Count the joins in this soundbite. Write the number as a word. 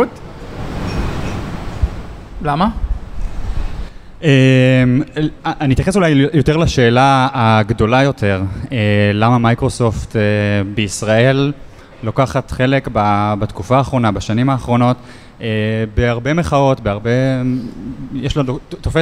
zero